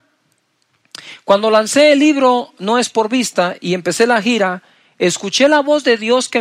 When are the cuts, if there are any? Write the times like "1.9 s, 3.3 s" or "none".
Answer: none

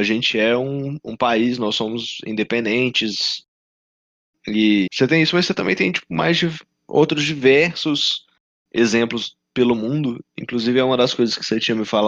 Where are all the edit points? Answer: 4.9 s

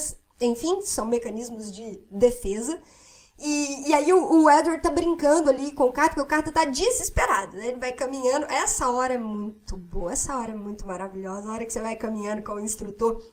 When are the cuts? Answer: none

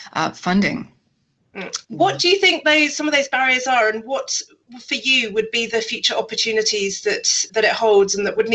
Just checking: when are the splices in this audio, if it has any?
1.8 s

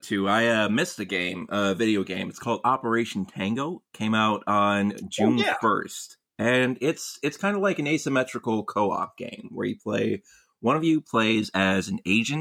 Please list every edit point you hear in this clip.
none

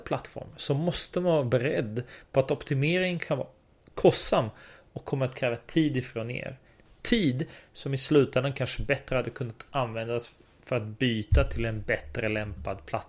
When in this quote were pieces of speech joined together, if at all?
none

